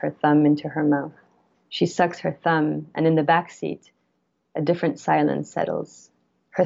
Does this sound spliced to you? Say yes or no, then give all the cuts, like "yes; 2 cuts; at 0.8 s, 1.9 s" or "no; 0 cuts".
no; 0 cuts